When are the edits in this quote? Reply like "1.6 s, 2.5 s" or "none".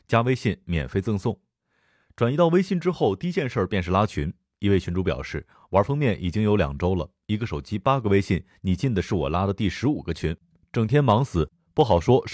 none